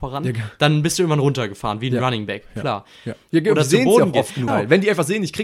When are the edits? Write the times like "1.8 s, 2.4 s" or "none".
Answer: 3.3 s, 4.5 s